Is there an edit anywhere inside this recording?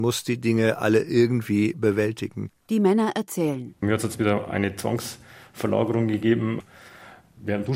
no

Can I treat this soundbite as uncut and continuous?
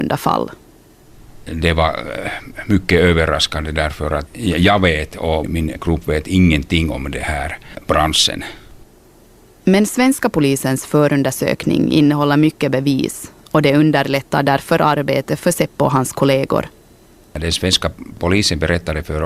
yes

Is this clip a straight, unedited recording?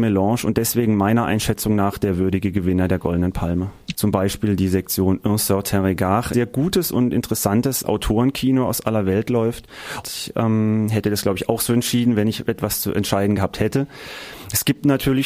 no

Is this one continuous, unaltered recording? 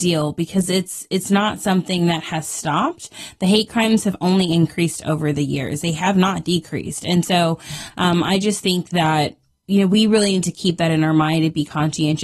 yes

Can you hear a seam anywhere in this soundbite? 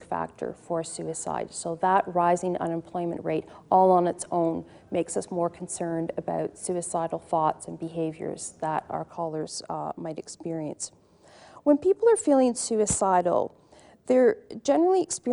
no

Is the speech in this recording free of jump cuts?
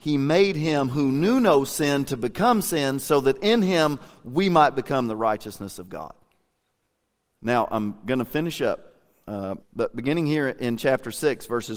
no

